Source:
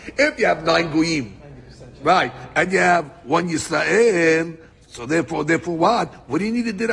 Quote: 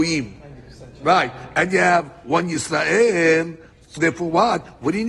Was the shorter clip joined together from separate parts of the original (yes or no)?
yes